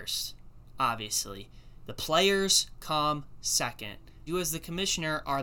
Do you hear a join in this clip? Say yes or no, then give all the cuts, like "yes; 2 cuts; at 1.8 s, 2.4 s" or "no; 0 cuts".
yes; 1 cut; at 4.3 s